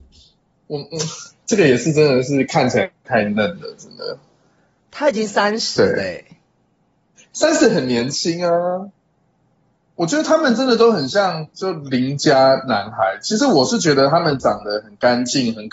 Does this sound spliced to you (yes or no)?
no